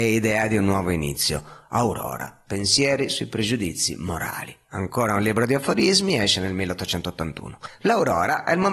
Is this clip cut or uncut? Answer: uncut